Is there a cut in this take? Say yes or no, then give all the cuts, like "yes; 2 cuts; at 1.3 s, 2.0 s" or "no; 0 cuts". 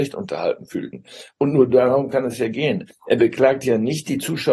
yes; 1 cut; at 2.9 s